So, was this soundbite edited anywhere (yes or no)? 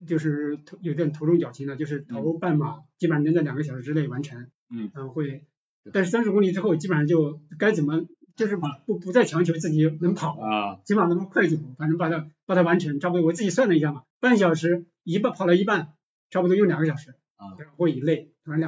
yes